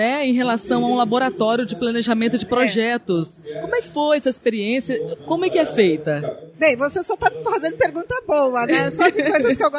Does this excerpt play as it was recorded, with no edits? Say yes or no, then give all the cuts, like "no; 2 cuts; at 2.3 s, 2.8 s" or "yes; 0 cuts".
no; 1 cut; at 5.1 s